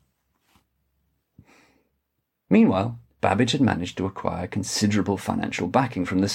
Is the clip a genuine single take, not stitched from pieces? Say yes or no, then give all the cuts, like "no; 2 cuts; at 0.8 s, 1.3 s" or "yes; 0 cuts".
yes; 0 cuts